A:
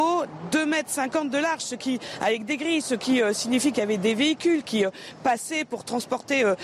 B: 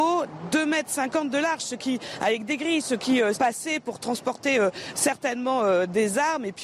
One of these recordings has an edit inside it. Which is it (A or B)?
B